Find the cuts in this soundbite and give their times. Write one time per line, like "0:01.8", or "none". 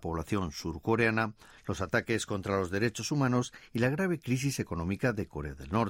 0:01.5